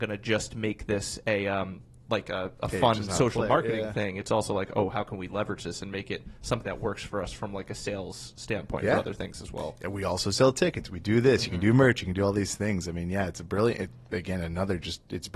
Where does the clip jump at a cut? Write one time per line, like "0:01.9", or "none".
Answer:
none